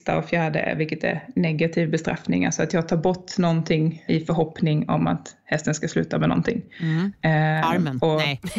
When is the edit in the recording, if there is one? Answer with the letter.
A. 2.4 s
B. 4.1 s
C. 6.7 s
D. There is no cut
B